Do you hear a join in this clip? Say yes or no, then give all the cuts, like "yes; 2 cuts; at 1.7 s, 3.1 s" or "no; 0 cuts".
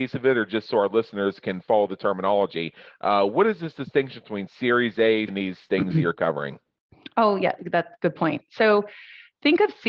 yes; 1 cut; at 5.3 s